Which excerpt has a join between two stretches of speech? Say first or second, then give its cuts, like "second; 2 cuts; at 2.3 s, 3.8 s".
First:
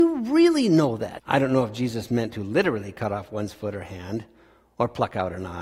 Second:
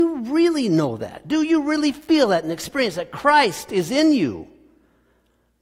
first; 1 cut; at 1.2 s